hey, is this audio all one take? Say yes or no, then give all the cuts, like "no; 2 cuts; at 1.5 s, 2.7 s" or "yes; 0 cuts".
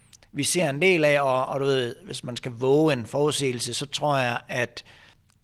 yes; 0 cuts